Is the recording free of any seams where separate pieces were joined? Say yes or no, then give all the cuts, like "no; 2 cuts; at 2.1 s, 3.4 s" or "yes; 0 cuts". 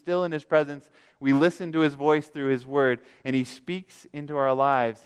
yes; 0 cuts